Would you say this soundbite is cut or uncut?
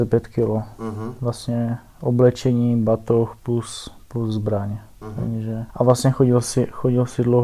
cut